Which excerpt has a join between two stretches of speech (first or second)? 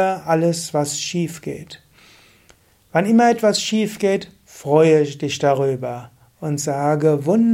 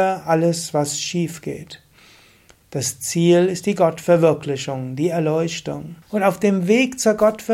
second